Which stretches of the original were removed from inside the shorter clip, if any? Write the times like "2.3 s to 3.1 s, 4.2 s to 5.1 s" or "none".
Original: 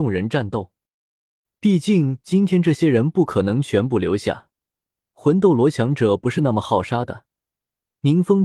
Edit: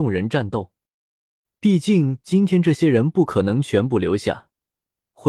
none